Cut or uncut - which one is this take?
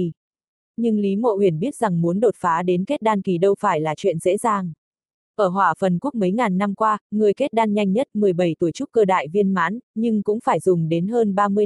uncut